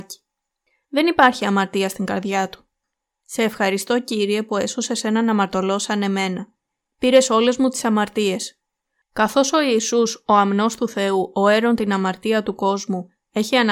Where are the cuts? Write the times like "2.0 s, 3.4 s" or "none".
9.0 s